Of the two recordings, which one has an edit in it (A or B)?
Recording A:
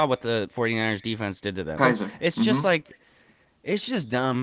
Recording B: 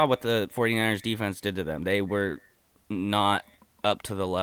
A